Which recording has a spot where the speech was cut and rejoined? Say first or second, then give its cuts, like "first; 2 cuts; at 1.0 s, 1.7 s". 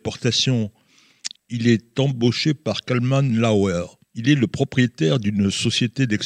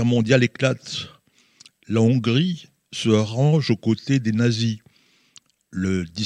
first; 2 cuts; at 1.3 s, 4.0 s